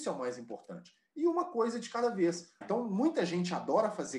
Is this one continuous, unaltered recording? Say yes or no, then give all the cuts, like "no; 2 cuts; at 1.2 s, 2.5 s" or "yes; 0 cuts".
no; 1 cut; at 2.6 s